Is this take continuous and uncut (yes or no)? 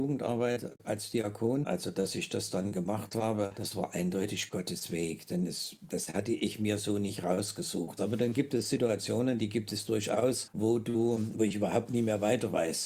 no